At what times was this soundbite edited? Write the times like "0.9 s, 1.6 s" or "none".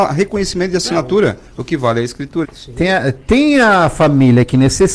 2.4 s

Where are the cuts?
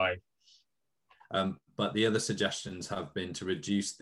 1.2 s

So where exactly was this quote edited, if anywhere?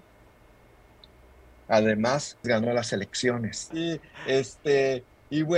2.4 s, 3.7 s

